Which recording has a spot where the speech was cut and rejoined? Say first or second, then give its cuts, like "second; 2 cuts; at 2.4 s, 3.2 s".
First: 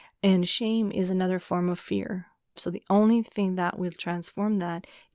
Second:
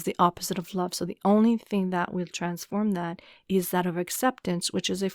first; 1 cut; at 2.6 s